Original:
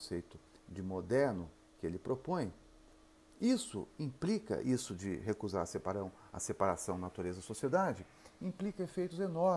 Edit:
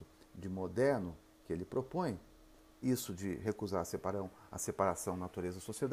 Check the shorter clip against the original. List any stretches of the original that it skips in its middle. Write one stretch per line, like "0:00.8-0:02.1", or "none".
0:03.1-0:04.6